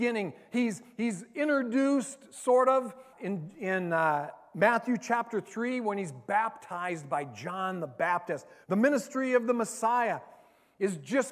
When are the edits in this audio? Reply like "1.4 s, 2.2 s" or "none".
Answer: 3.1 s, 8.6 s